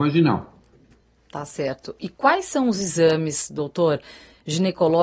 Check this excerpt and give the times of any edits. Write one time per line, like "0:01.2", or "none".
none